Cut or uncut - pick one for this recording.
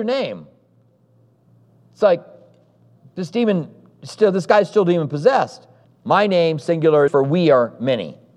cut